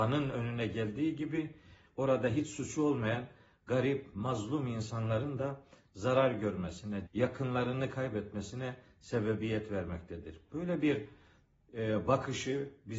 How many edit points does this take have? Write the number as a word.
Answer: one